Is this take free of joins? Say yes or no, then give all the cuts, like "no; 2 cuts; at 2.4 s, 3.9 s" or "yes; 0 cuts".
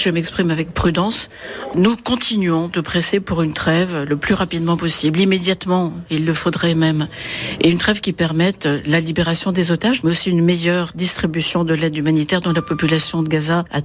yes; 0 cuts